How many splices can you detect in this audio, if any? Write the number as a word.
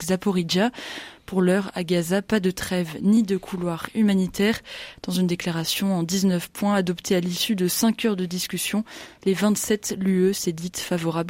zero